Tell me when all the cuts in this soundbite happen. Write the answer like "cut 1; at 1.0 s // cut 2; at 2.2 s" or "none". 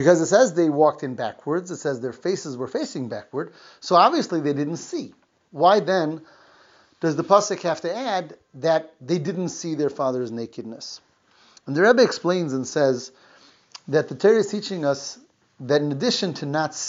none